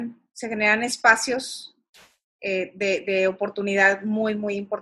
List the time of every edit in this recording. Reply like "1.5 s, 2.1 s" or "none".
none